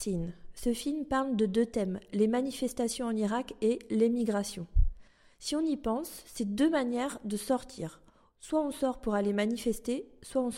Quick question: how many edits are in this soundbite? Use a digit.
0